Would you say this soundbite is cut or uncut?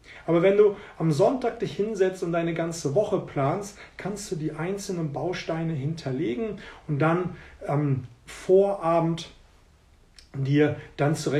uncut